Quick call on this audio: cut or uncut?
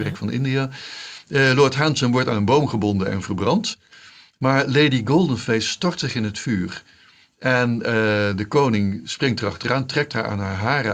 uncut